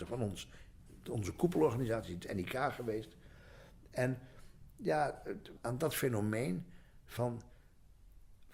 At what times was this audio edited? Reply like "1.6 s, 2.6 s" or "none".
5.6 s